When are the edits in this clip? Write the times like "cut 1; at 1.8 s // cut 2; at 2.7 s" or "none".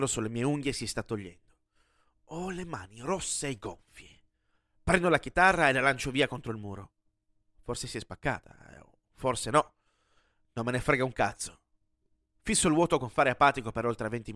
none

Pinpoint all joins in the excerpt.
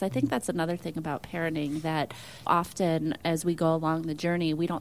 cut 1; at 2.5 s

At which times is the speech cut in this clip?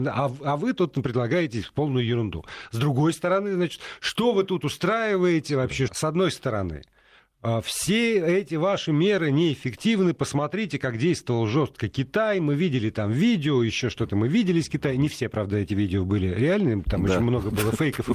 cut 1; at 5.9 s

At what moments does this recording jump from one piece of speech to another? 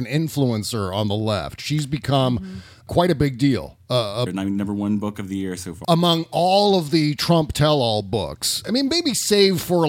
cut 1; at 4.3 s // cut 2; at 5.8 s // cut 3; at 8.6 s

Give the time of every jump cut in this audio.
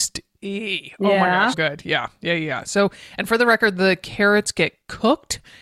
cut 1; at 1.5 s

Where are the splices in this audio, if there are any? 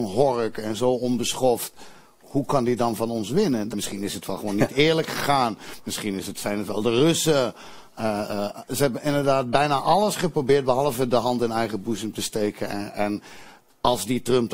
cut 1; at 3.7 s

